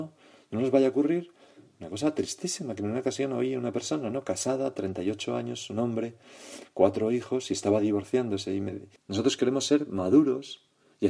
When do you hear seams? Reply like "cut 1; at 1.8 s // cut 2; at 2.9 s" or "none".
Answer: cut 1; at 9.0 s